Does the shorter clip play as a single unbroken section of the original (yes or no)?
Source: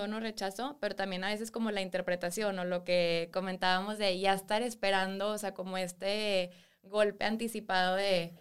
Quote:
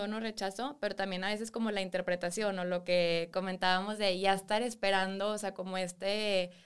yes